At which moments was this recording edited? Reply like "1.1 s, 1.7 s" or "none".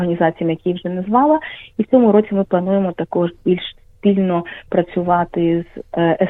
none